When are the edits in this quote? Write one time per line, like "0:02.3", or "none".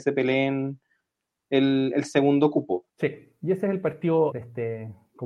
0:02.9
0:04.3